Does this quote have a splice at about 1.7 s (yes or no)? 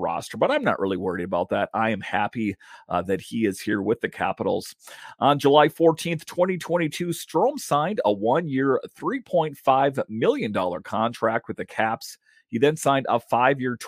no